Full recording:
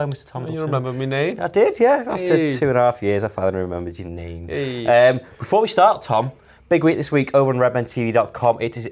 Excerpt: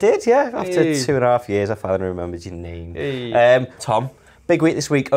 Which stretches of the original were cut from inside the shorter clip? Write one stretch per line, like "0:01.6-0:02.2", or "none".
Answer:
0:05.3-0:06.0